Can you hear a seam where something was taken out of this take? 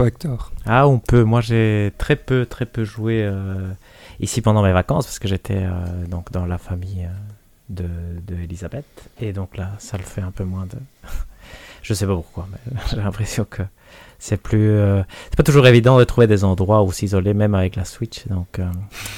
no; 0 cuts

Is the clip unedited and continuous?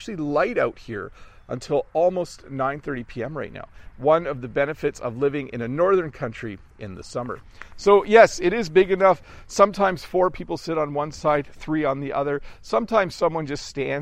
yes; 0 cuts

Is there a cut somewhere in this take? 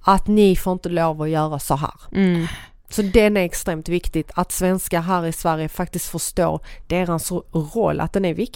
no; 0 cuts

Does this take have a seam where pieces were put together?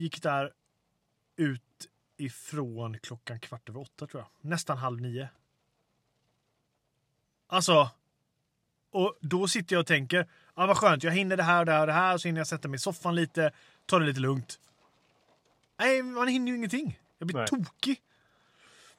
no; 0 cuts

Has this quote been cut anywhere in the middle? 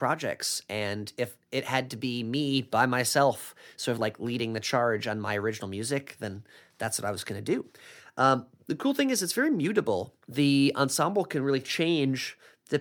yes; 1 cut; at 10.2 s

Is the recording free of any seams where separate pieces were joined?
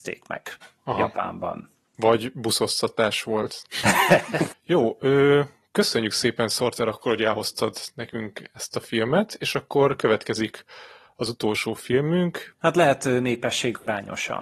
no; 2 cuts; at 4.5 s, 12.5 s

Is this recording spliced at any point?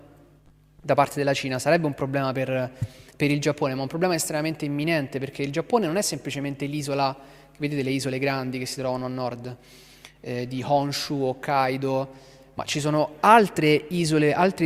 no; 0 cuts

